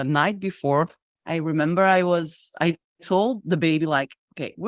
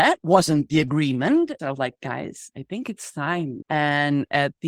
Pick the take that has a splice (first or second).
second